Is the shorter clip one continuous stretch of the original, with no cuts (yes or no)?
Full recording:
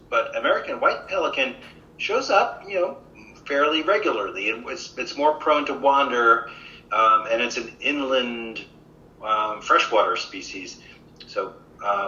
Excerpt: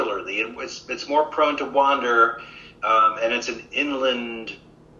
yes